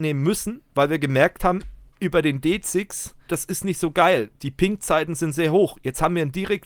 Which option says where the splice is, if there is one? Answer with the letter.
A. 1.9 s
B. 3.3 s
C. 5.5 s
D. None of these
B